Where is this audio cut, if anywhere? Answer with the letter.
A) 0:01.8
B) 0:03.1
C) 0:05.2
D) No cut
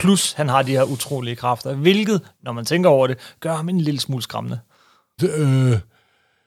C